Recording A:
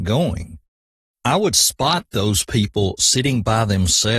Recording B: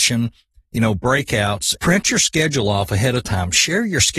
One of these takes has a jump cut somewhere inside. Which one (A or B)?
B